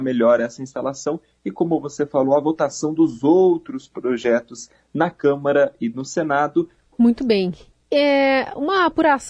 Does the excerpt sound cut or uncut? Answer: cut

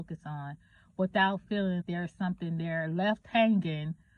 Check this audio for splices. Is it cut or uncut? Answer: cut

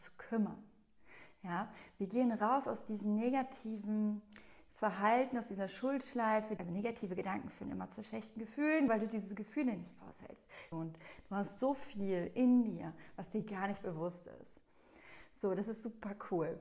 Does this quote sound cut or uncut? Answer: cut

